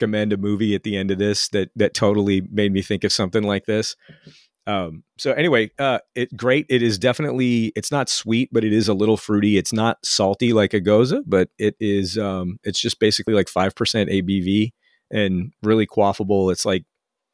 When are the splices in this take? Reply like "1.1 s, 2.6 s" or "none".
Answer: none